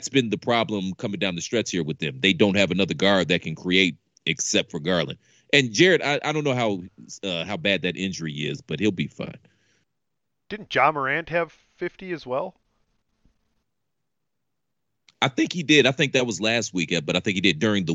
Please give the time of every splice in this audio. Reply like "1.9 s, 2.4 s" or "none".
none